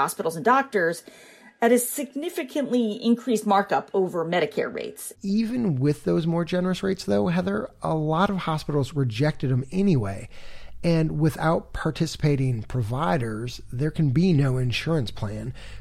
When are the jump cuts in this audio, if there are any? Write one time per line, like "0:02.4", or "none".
0:05.1